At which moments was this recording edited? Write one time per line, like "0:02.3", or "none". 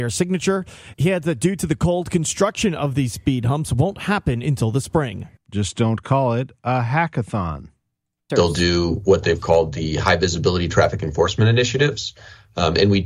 0:05.4
0:08.3